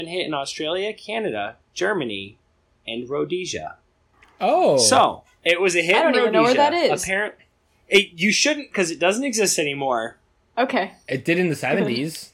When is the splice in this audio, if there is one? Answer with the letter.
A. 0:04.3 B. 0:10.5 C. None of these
C